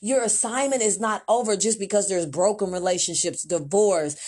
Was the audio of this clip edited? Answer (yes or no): no